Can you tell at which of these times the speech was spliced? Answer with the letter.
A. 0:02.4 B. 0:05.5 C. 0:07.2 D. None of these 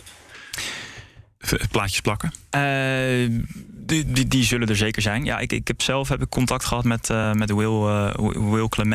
D